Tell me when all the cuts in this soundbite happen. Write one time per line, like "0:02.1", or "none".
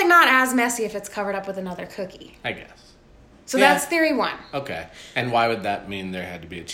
none